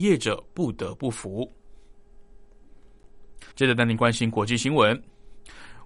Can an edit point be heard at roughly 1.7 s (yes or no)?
no